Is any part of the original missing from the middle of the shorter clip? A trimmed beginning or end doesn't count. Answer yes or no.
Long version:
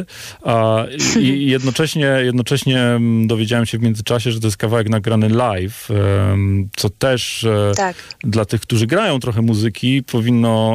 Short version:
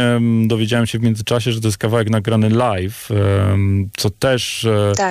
no